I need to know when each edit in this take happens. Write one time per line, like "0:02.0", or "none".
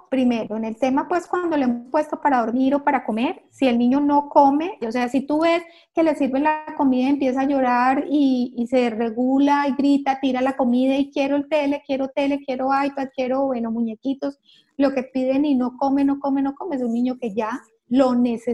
0:04.8